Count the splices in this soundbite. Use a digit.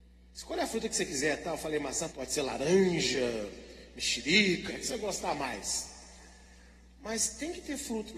2